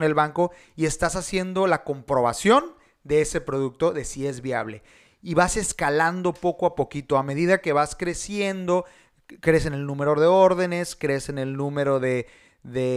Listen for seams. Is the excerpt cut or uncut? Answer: uncut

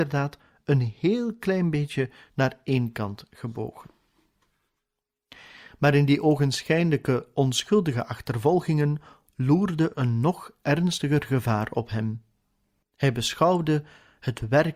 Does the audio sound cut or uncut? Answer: cut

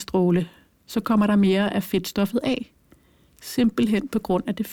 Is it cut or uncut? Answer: uncut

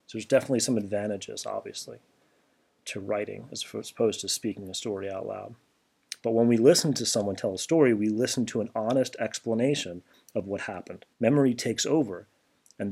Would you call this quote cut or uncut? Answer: cut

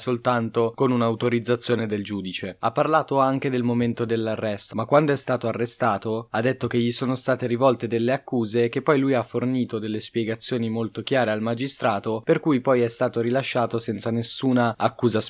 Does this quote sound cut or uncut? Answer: cut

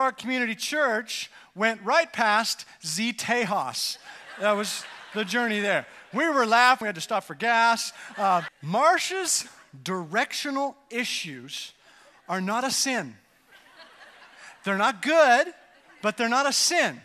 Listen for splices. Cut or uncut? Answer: cut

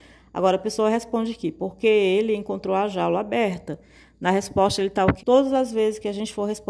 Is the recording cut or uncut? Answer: cut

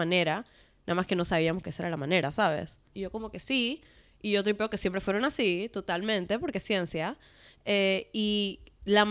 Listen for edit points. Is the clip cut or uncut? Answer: cut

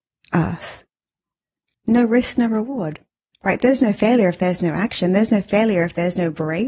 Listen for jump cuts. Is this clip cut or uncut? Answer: cut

